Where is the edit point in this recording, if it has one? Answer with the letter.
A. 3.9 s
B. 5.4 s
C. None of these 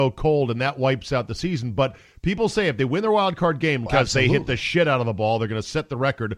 A